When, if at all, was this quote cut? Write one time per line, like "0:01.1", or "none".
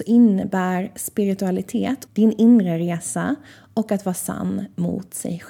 0:02.1